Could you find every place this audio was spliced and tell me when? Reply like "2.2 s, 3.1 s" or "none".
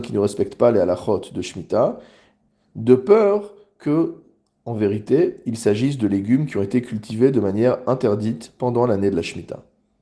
none